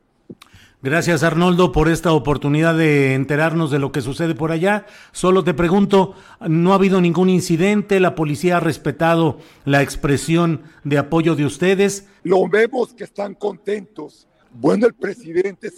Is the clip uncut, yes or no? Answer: no